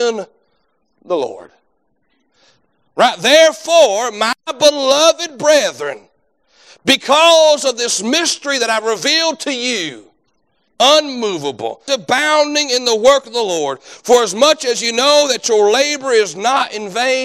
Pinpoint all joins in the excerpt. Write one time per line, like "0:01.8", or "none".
0:02.9
0:10.7
0:11.9